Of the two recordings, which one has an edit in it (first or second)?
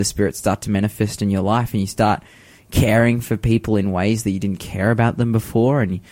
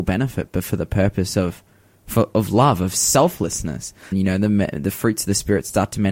second